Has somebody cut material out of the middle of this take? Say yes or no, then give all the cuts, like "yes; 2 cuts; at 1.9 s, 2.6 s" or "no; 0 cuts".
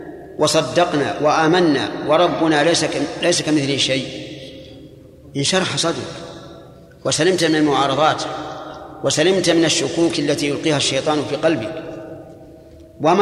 no; 0 cuts